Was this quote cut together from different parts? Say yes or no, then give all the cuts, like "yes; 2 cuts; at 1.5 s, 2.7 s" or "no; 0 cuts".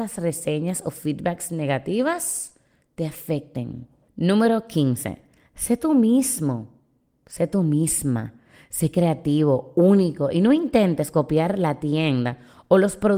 no; 0 cuts